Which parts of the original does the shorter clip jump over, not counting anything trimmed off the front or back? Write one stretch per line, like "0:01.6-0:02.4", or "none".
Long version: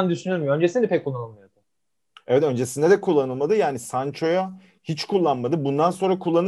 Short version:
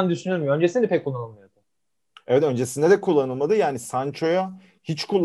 none